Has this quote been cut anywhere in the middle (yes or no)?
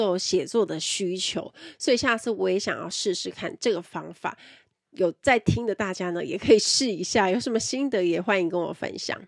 no